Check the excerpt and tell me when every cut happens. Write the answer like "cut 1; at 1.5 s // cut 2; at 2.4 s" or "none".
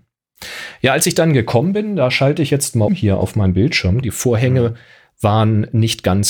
cut 1; at 2.9 s // cut 2; at 4.0 s